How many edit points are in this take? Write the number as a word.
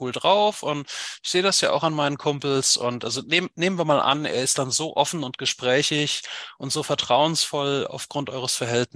zero